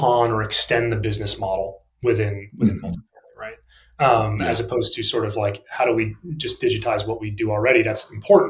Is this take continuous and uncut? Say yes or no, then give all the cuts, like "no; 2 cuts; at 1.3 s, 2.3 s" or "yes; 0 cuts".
yes; 0 cuts